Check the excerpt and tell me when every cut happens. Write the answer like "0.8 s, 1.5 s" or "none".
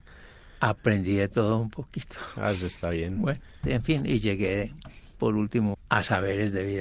3.6 s, 5.7 s